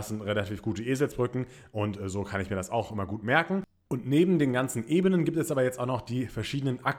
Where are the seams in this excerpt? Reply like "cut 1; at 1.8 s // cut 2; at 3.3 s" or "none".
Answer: none